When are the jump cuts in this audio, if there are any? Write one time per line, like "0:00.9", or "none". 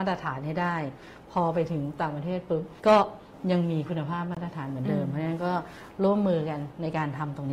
0:02.8